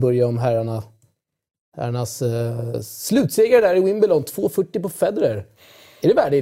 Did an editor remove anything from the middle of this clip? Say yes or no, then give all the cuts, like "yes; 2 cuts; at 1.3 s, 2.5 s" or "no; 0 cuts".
no; 0 cuts